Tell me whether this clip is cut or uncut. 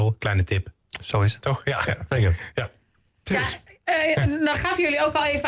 cut